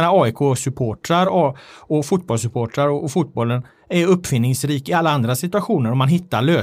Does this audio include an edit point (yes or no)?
no